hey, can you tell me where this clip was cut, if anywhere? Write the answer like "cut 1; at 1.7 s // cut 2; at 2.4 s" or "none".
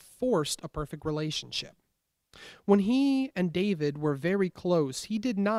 none